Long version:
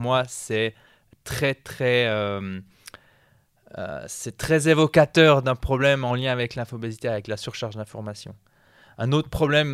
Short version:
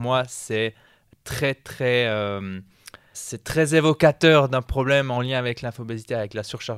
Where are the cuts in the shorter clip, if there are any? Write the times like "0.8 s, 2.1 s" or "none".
3.1 s